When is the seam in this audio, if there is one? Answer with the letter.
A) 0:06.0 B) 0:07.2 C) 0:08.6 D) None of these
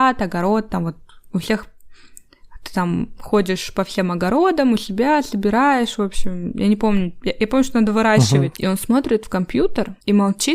C